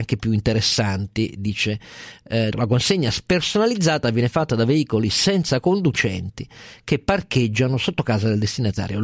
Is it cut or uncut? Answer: cut